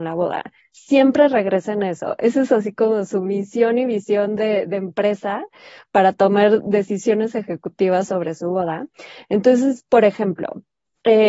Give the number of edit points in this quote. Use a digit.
0